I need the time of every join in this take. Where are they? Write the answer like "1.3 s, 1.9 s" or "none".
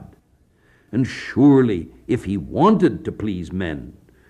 none